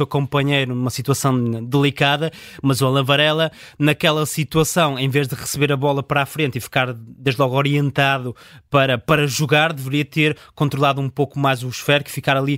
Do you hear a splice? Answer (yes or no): no